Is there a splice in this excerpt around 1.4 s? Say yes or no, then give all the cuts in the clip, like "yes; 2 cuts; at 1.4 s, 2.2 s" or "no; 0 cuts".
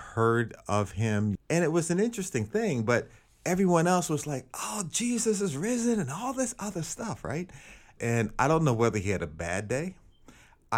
yes; 2 cuts; at 1.4 s, 8.0 s